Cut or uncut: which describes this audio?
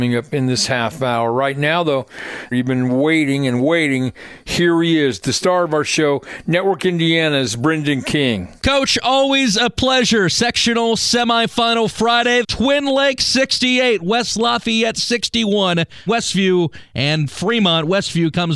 cut